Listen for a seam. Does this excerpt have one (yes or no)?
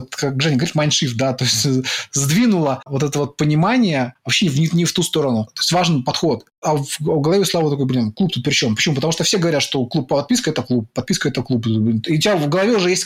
yes